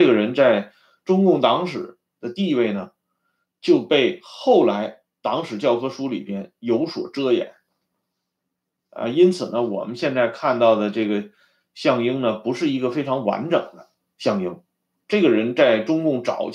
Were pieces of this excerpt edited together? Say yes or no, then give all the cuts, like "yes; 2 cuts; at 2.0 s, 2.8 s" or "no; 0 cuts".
no; 0 cuts